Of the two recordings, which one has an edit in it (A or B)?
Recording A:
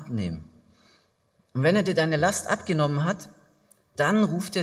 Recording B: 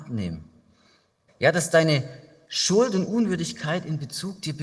B